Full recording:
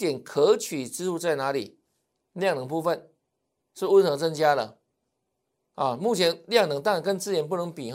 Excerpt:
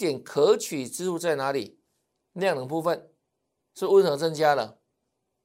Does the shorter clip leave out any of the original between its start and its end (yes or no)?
no